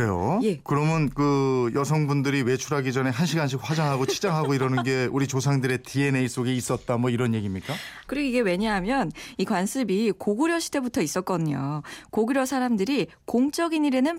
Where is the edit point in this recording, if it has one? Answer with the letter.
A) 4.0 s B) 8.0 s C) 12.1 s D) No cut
B